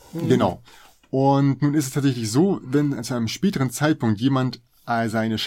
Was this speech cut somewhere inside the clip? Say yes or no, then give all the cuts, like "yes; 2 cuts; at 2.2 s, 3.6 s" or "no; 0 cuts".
no; 0 cuts